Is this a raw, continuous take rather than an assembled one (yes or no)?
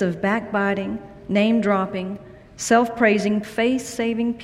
no